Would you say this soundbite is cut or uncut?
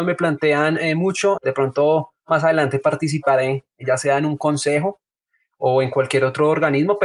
cut